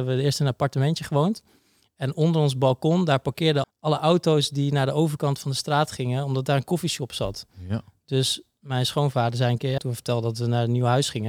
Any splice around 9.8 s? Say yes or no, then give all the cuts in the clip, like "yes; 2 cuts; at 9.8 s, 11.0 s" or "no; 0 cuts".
yes; 2 cuts; at 3.6 s, 9.8 s